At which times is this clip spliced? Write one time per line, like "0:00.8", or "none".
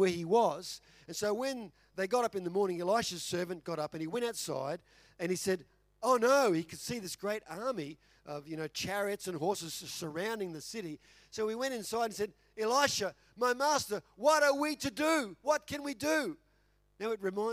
none